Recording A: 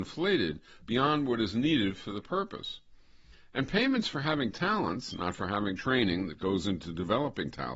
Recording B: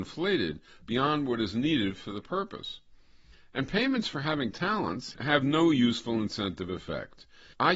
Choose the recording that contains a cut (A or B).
B